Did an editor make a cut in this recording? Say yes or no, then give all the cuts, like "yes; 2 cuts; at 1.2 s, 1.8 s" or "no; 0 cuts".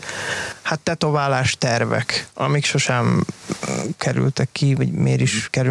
no; 0 cuts